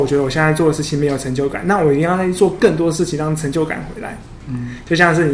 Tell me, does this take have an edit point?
yes; 1 cut; at 4.4 s

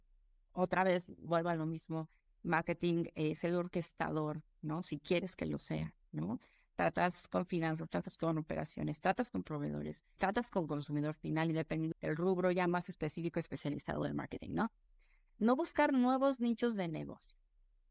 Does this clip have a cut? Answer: yes; 2 cuts; at 10.2 s, 11.9 s

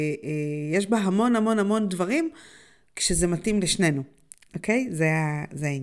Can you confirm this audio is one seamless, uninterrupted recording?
yes; 0 cuts

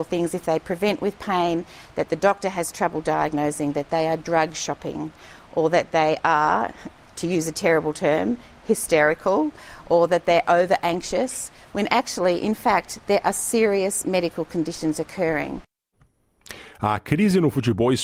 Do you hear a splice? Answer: no; 0 cuts

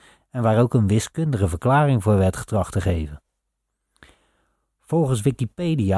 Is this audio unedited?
yes; 0 cuts

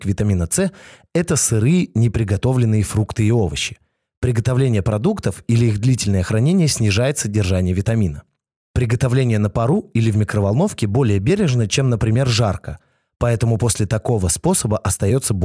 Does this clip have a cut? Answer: no; 0 cuts

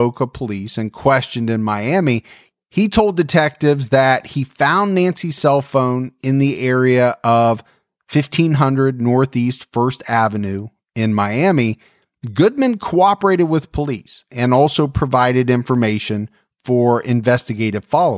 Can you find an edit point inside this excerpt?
no; 0 cuts

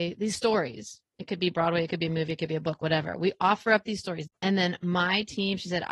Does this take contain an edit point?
yes; 1 cut; at 4.3 s

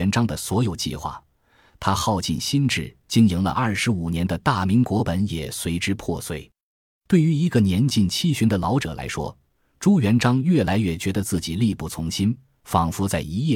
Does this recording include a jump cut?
no; 0 cuts

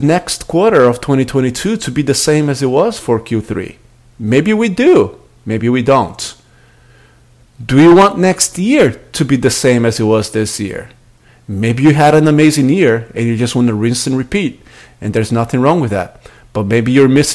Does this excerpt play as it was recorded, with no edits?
yes; 0 cuts

